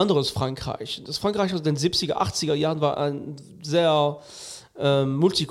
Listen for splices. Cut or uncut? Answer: uncut